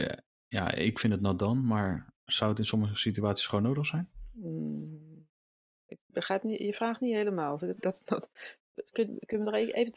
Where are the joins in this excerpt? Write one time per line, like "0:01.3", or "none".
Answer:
0:07.8